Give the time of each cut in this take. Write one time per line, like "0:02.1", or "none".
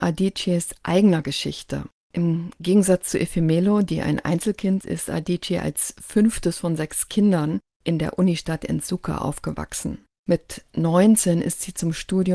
0:04.8